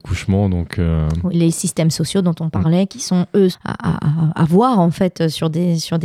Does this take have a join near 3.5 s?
yes; 2 cuts; at 1.3 s, 3.5 s

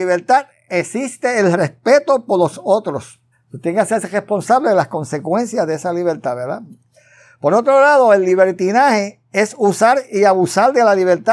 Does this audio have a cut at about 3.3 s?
yes; 1 cut; at 3.3 s

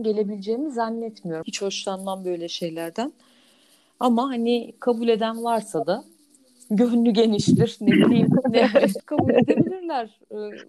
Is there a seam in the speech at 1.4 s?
yes; 2 cuts; at 1.4 s, 9.0 s

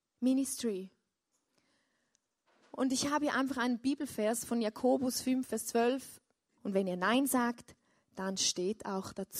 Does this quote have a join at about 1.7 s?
no; 1 cut; at 6.6 s

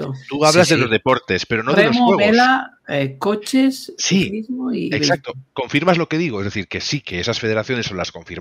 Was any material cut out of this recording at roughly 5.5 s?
no; 1 cut; at 7.0 s

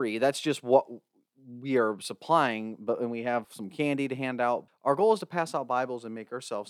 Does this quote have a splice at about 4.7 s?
yes; 2 cuts; at 3.4 s, 4.7 s

